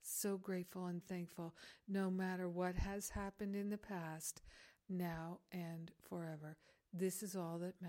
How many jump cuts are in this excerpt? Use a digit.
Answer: 2